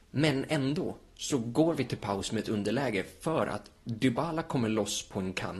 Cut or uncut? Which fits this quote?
uncut